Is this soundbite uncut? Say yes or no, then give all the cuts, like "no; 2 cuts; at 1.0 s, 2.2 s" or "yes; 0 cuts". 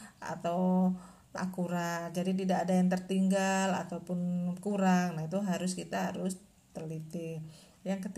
no; 1 cut; at 1.4 s